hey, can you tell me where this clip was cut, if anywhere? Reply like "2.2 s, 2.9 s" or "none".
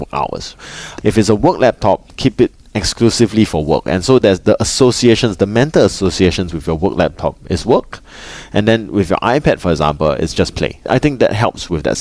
1.0 s